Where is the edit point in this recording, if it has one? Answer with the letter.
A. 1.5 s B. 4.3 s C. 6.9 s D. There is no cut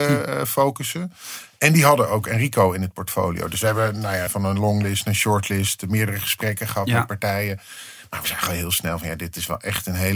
B